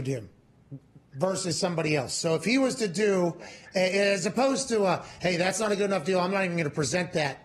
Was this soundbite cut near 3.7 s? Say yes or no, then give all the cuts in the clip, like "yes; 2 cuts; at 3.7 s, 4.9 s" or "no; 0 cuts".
no; 0 cuts